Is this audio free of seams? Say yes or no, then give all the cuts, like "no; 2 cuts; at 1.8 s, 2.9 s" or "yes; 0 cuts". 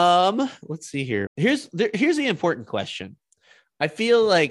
no; 1 cut; at 1.3 s